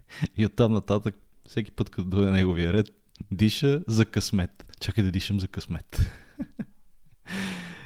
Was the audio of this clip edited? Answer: no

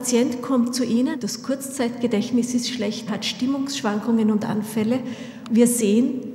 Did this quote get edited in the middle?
yes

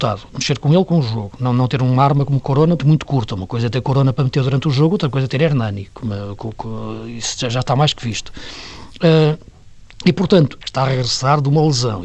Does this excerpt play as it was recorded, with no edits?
no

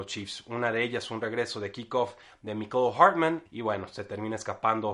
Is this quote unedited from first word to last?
no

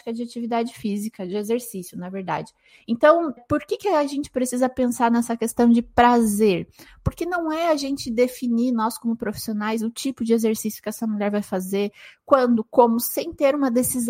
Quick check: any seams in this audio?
yes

